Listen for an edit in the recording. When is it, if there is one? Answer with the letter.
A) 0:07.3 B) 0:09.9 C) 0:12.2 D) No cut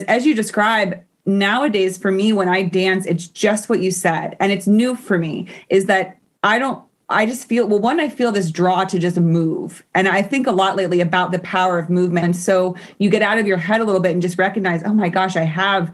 C